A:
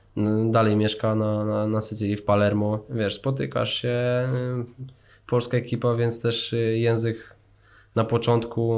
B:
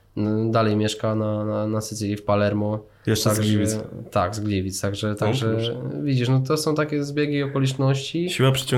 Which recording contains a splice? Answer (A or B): A